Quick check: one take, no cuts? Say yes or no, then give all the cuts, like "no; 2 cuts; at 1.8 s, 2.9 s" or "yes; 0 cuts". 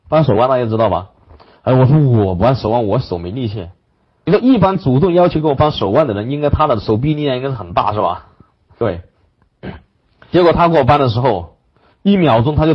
no; 1 cut; at 6.8 s